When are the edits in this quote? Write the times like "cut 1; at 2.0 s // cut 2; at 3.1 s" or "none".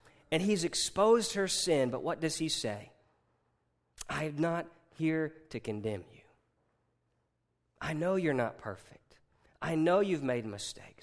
none

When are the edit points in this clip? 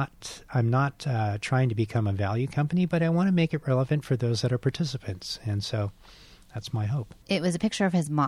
cut 1; at 7.2 s

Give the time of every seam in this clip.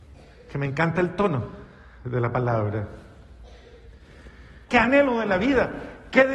cut 1; at 4.7 s

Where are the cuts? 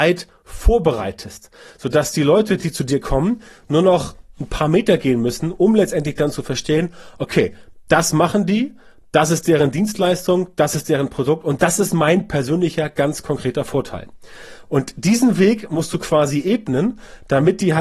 none

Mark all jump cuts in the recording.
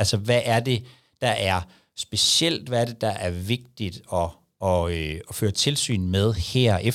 none

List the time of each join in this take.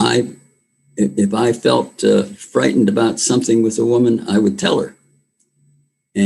none

